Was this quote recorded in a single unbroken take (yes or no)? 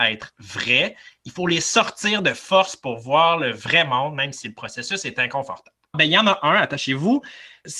no